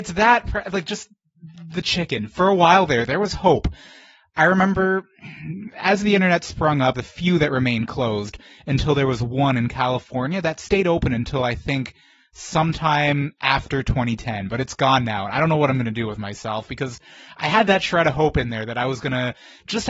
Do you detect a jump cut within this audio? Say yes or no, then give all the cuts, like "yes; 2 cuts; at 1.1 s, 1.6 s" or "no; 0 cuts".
yes; 1 cut; at 6.9 s